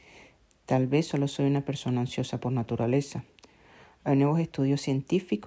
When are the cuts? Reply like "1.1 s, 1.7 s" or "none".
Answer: none